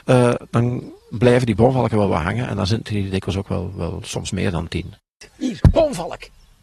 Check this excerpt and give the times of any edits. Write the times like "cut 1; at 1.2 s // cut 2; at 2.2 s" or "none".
none